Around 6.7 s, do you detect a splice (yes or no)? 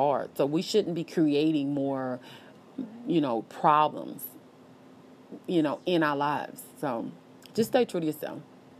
yes